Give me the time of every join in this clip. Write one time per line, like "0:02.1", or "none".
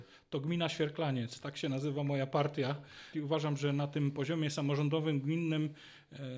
0:03.1